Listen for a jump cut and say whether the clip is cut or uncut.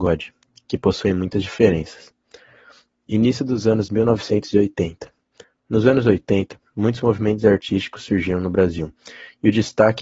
uncut